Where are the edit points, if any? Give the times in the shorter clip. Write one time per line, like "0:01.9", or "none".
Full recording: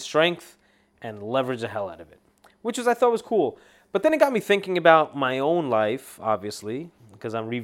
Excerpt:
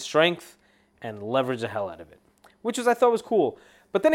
none